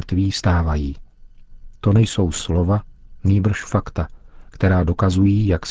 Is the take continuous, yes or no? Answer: yes